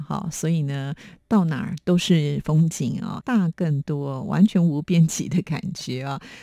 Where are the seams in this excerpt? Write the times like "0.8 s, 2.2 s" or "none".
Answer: 3.2 s

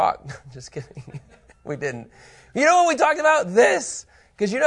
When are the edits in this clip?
none

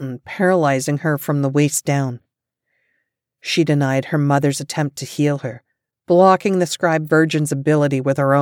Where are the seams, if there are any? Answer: none

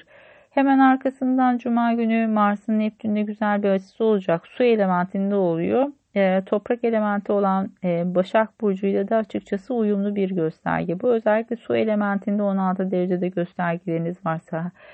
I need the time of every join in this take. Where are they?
none

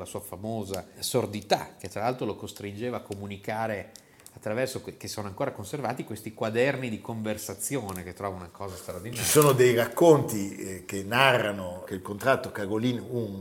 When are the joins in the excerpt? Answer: none

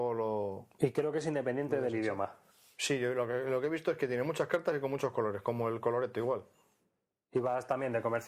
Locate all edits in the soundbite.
none

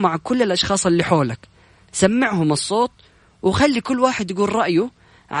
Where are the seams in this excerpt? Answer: none

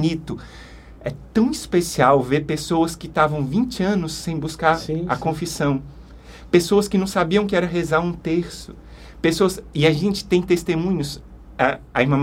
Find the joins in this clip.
none

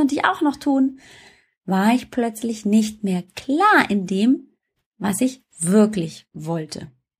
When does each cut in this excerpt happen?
none

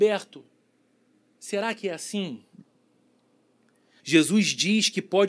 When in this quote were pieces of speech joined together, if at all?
4.0 s

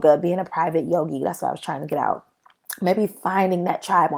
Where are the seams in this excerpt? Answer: none

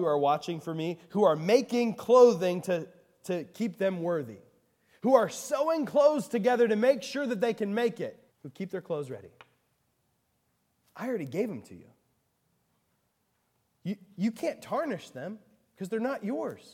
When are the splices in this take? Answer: 8.3 s

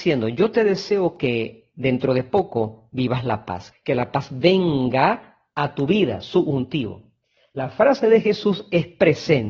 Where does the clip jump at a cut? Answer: 3.7 s

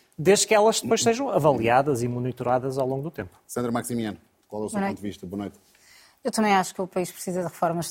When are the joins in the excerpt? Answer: none

